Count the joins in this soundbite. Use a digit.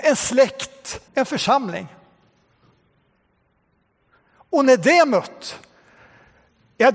1